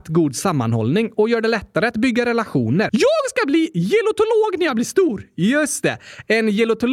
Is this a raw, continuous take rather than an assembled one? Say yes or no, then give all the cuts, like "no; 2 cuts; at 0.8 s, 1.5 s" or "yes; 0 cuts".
no; 1 cut; at 2.9 s